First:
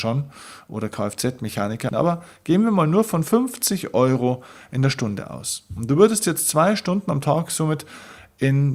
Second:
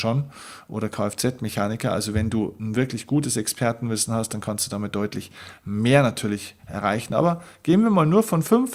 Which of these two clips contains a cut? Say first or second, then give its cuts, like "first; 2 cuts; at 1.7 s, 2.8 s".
first; 1 cut; at 1.9 s